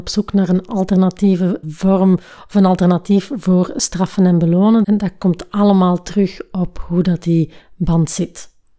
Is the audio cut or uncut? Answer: cut